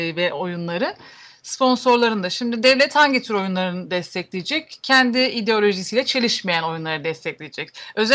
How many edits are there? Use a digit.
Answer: 0